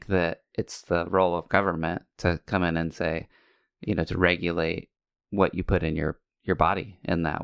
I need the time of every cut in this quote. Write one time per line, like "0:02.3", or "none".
none